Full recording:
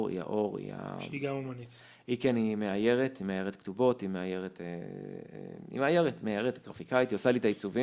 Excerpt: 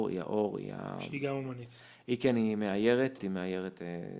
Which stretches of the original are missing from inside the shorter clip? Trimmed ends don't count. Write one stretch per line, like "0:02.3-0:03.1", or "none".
0:03.2-0:04.0

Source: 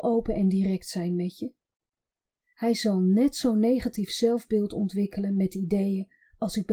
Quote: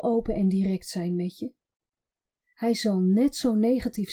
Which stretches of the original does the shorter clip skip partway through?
none

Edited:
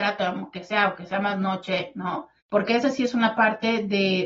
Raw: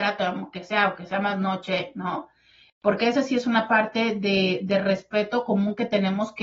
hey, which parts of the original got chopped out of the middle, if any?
0:02.4-0:02.7

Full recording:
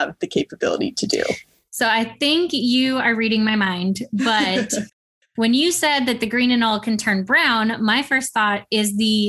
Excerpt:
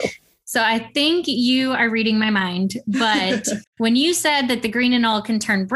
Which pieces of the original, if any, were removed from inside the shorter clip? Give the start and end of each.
0:05.0-0:05.3

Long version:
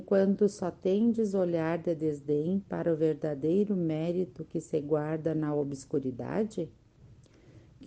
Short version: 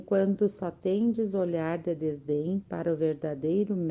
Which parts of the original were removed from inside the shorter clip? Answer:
none

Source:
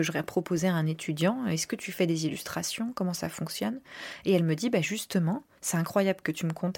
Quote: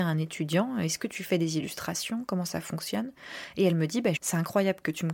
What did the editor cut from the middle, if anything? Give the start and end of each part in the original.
0:04.8-0:05.6

